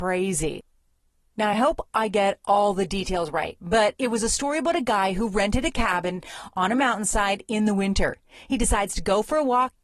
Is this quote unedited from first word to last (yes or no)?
yes